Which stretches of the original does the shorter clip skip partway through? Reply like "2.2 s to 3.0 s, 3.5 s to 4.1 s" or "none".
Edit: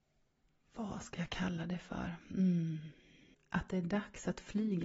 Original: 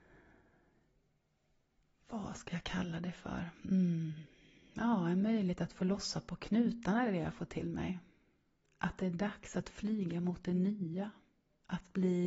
4.7 s to 8.6 s